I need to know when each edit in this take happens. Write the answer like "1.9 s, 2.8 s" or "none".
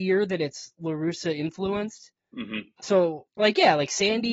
3.3 s